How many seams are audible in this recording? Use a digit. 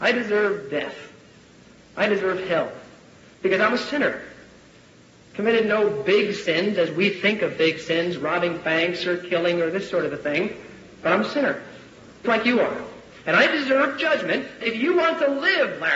2